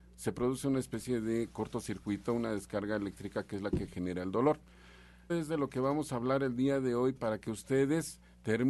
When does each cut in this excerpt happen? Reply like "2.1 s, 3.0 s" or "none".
5.3 s, 7.1 s